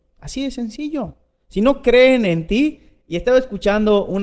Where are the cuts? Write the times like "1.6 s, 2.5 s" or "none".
none